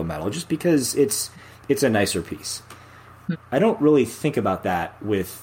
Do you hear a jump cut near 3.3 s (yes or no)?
yes